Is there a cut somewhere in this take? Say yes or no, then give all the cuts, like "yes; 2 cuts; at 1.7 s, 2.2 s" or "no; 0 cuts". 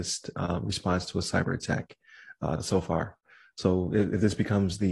yes; 1 cut; at 2.6 s